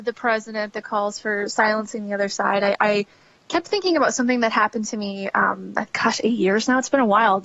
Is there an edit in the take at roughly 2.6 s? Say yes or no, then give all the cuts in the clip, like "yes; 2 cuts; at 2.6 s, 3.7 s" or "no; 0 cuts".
no; 1 cut; at 5.9 s